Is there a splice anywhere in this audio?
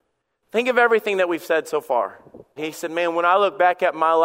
yes; 1 cut; at 2.6 s

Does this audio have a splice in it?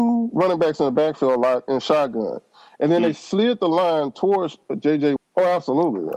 yes; 1 cut; at 5.2 s

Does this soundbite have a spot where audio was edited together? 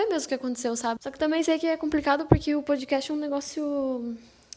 yes; 1 cut; at 1.0 s

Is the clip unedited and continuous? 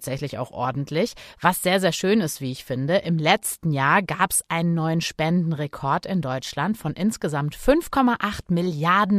yes; 0 cuts

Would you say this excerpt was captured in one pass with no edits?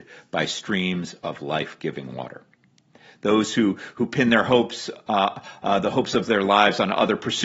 yes; 0 cuts

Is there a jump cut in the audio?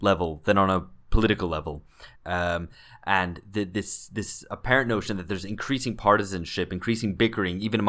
yes; 1 cut; at 2.2 s

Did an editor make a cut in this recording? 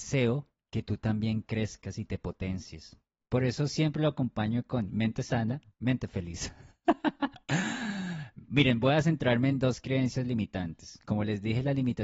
yes; 1 cut; at 3.2 s

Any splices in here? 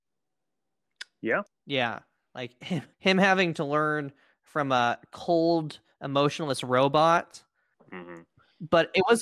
yes; 3 cuts; at 1.5 s, 2.9 s, 7.7 s

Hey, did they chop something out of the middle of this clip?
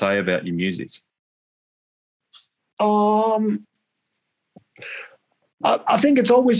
no; 0 cuts

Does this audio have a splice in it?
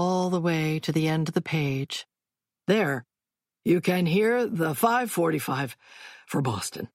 no; 0 cuts

